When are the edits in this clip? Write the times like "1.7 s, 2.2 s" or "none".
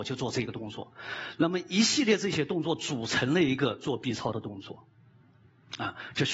none